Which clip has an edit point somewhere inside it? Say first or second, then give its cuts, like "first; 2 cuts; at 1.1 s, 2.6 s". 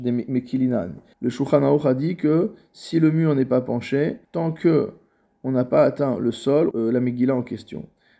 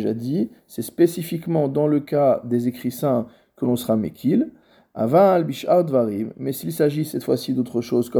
first; 3 cuts; at 1.1 s, 4.2 s, 6.7 s